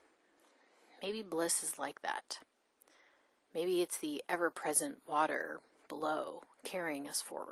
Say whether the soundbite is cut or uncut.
uncut